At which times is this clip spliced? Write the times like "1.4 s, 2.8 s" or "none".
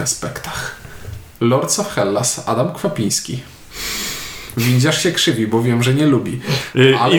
none